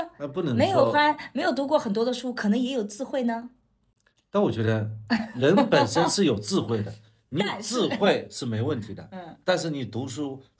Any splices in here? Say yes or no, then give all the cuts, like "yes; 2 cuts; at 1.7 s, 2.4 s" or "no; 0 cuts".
no; 0 cuts